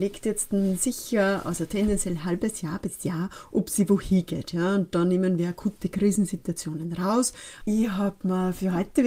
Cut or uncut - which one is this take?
cut